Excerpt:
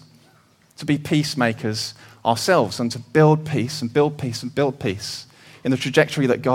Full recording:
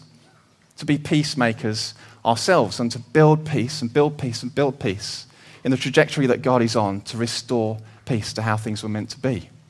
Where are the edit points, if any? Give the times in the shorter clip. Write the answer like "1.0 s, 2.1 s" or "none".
none